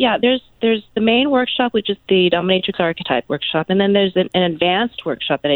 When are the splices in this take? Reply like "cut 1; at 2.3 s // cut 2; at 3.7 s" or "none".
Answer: cut 1; at 2.0 s